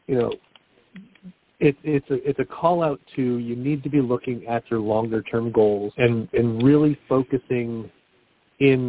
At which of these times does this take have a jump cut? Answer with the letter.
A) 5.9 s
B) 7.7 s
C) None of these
A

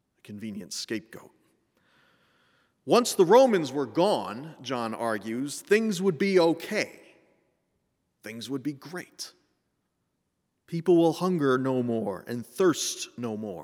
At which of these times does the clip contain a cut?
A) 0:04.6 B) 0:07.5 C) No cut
C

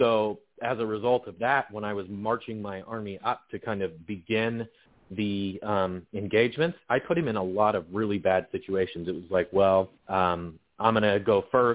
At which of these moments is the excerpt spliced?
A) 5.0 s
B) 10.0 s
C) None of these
B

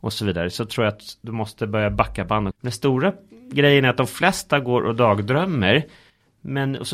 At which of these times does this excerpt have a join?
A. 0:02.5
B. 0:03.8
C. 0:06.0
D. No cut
A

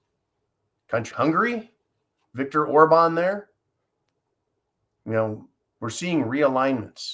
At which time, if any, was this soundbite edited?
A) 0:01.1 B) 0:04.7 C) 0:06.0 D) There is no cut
A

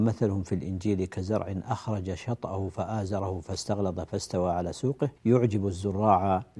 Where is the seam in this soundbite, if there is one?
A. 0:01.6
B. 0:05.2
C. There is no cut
B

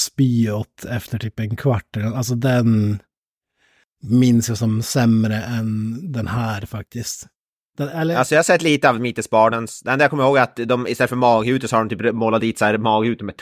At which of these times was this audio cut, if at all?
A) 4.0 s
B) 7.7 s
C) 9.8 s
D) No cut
D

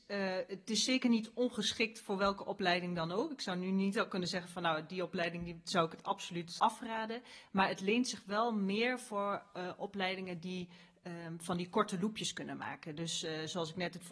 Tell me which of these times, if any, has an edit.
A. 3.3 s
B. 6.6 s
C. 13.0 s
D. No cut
B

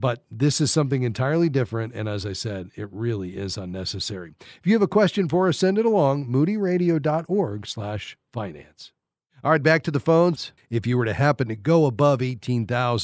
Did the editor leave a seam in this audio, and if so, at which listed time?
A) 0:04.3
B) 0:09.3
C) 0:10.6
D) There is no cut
C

